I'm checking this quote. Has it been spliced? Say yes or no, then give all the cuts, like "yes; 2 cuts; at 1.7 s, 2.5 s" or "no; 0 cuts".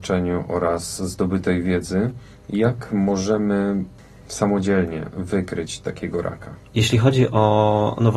yes; 1 cut; at 6.7 s